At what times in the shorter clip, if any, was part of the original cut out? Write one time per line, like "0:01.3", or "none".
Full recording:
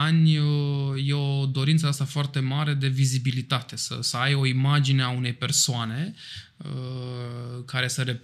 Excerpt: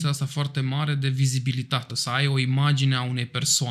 0:01.9